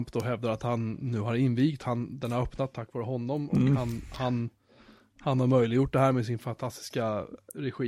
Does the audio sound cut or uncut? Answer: uncut